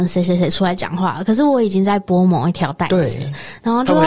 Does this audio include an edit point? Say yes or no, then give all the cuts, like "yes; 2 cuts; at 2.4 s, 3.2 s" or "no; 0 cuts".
no; 0 cuts